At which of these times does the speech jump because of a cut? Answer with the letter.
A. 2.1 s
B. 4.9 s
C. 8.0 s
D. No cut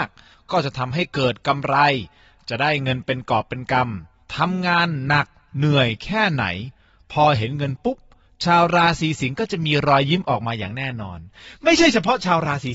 D